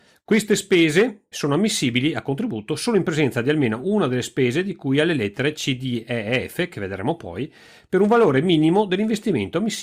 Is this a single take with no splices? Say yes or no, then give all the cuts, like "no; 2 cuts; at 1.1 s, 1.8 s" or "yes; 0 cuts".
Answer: no; 1 cut; at 1.3 s